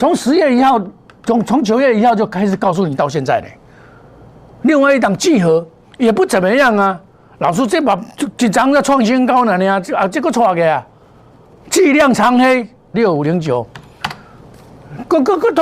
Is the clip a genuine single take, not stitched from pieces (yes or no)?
no